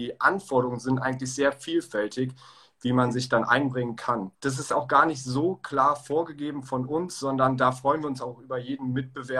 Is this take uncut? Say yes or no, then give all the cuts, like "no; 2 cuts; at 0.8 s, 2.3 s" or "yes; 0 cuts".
no; 1 cut; at 4.3 s